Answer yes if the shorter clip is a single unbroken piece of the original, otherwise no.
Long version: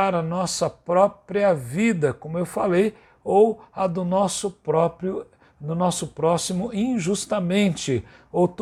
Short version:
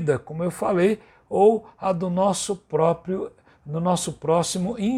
yes